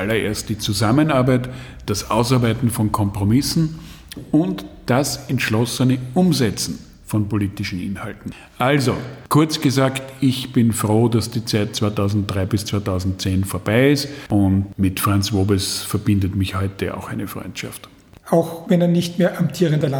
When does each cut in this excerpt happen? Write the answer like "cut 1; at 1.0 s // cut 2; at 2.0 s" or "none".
cut 1; at 1.8 s